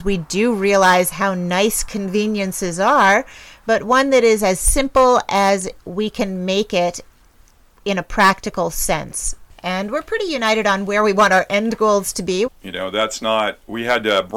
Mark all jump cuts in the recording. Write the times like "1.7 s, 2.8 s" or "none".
9.5 s, 12.5 s